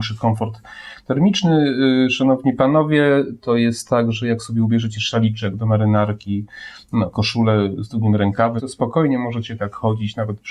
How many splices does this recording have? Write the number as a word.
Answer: one